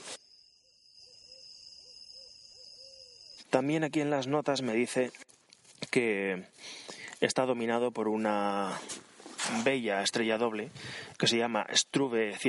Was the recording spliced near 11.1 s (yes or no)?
no